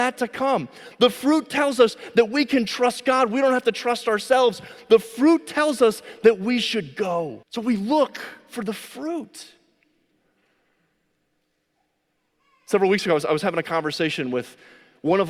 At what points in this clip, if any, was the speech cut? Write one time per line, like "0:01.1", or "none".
0:07.4